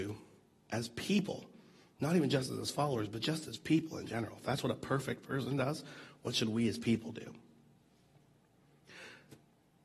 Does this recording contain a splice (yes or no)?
no